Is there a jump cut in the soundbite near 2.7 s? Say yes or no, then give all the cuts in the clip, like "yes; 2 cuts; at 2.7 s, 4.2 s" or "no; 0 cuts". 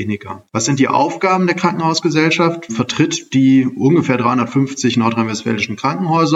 yes; 1 cut; at 2.7 s